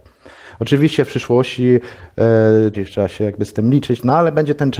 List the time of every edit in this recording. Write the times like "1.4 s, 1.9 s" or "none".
2.7 s